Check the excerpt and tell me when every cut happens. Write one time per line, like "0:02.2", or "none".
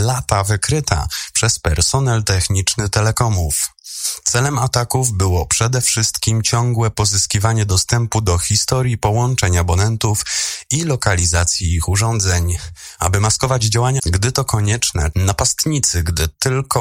0:14.0
0:15.1